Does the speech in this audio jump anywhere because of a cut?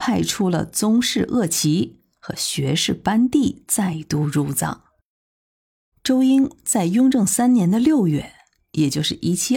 yes; 1 cut; at 5.9 s

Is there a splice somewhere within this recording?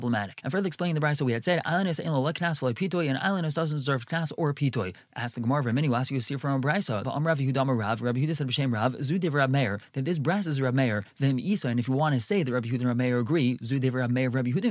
yes; 1 cut; at 7.0 s

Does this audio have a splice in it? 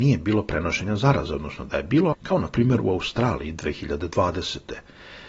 yes; 1 cut; at 2.1 s

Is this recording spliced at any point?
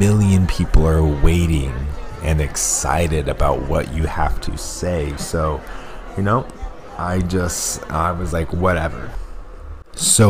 no; 0 cuts

